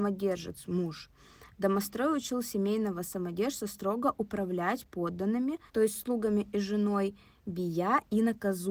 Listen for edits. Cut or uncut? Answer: cut